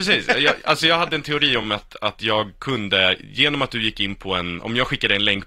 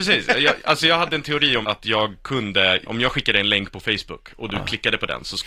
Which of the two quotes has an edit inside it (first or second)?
second